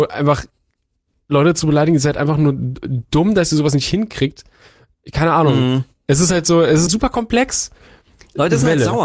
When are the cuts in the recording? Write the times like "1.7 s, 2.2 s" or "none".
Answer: 6.9 s